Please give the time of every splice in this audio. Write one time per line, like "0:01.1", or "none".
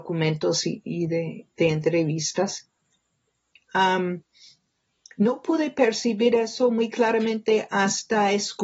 0:03.5